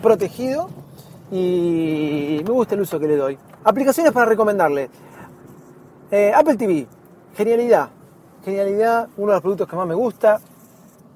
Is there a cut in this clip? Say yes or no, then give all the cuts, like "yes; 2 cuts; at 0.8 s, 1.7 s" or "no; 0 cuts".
yes; 1 cut; at 3.6 s